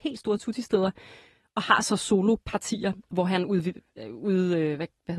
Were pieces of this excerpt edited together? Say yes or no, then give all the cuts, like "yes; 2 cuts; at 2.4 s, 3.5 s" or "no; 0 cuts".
no; 0 cuts